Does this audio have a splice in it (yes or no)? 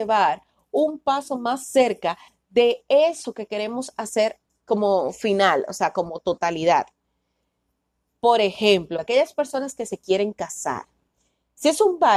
yes